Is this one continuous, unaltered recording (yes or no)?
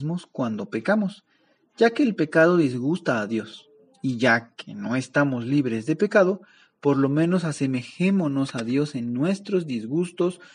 yes